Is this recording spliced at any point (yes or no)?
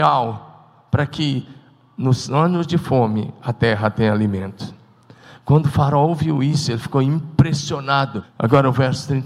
yes